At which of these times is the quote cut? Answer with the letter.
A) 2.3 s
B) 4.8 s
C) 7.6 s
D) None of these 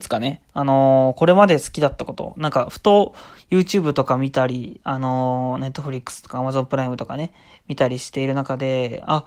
D